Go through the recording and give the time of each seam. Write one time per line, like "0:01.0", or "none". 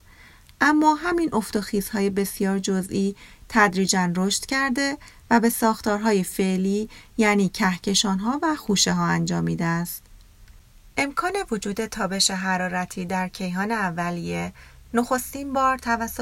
none